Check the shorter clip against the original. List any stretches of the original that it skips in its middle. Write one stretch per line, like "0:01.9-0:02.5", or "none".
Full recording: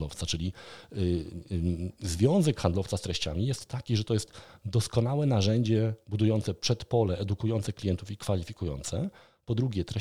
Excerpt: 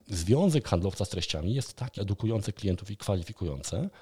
0:03.9-0:07.2